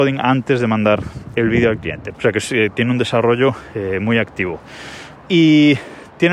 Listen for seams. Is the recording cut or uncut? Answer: cut